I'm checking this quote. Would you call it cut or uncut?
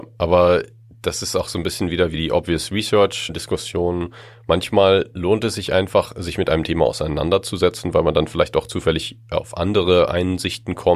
uncut